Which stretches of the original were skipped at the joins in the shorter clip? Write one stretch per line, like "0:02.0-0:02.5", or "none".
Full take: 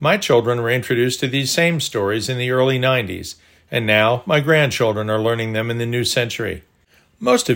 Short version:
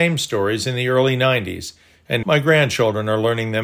0:03.9-0:04.2